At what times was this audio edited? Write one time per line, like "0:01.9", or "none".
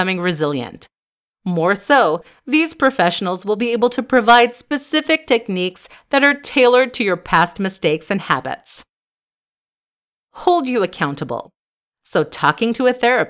0:10.1
0:11.8